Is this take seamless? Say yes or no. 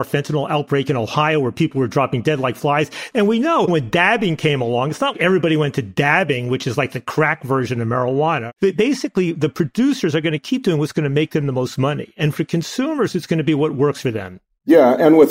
no